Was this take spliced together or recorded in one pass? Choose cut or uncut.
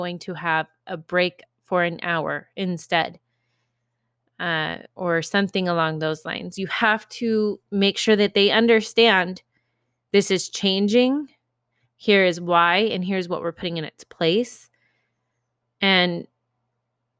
uncut